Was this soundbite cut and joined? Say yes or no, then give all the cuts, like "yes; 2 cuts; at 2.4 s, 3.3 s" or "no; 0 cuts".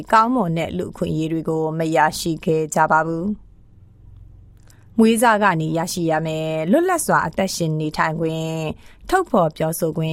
no; 0 cuts